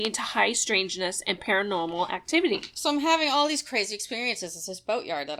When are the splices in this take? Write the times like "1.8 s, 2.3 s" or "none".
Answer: none